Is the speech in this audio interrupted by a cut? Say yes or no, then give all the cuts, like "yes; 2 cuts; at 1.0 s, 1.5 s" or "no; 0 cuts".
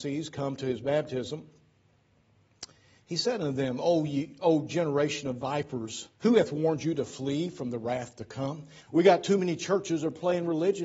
yes; 2 cuts; at 6.1 s, 8.8 s